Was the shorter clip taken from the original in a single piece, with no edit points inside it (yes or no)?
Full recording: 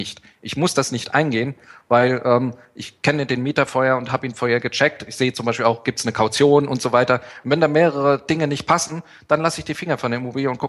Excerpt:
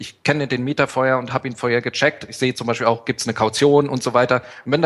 yes